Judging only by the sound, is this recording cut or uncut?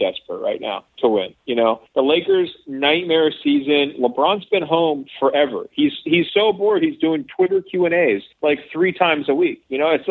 uncut